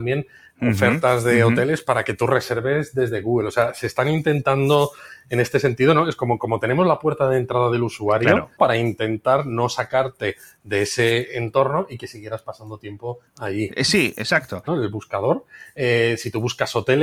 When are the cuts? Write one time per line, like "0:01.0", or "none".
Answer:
0:08.6
0:14.7